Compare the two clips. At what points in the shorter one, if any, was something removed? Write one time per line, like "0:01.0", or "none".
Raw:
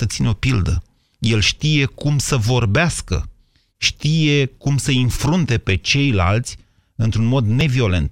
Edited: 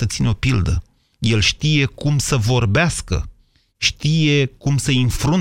none